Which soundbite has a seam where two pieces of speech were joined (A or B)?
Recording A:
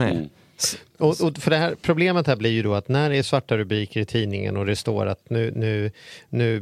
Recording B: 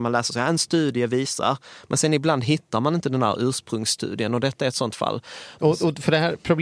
B